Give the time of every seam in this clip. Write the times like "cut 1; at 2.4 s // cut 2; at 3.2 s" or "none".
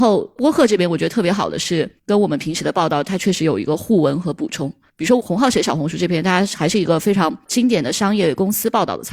none